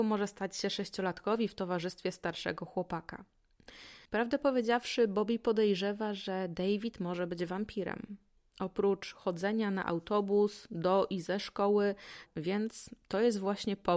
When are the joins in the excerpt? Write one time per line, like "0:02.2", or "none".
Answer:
0:04.1
0:12.3